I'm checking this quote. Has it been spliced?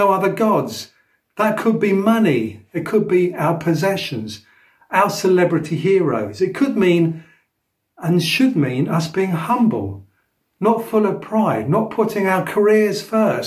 no; 0 cuts

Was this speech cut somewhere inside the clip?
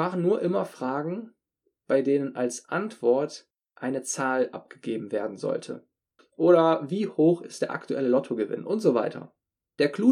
yes; 1 cut; at 6.2 s

